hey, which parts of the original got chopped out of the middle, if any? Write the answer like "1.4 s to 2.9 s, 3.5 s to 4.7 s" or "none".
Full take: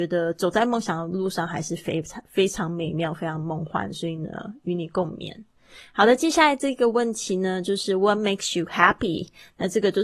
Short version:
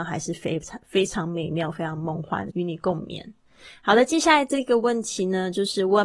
3.9 s to 4.6 s